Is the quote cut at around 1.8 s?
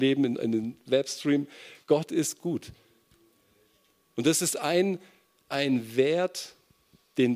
no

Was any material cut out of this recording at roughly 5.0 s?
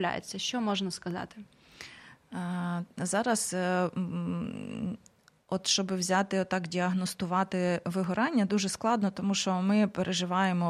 no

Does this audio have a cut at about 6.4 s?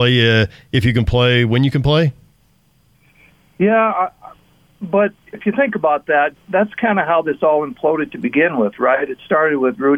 yes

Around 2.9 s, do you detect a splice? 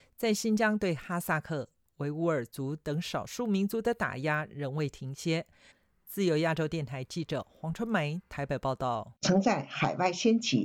no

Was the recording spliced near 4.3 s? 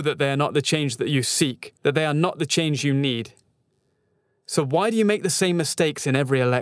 no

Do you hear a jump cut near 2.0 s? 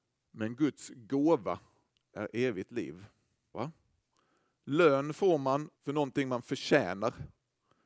no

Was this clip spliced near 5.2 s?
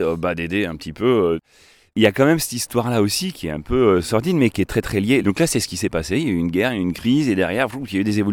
yes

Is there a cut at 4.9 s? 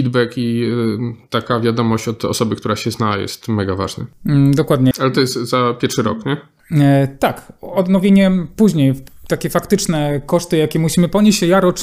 yes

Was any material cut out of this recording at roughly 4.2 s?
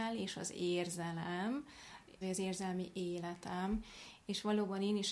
no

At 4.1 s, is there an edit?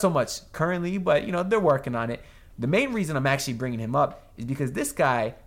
no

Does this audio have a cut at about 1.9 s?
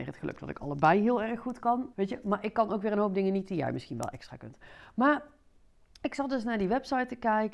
yes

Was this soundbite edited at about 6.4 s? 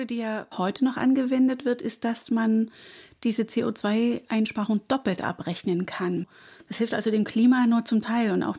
no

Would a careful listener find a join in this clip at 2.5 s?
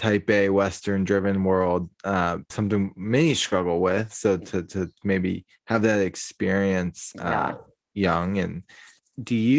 yes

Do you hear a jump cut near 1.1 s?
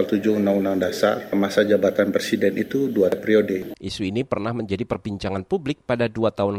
no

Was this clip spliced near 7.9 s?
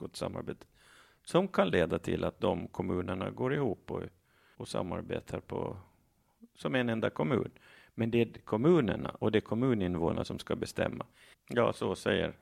no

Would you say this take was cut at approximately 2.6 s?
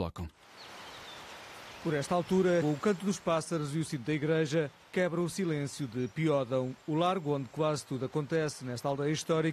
yes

